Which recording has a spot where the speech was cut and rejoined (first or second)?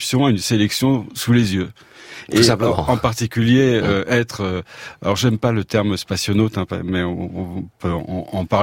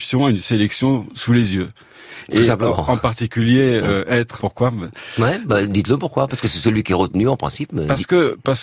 second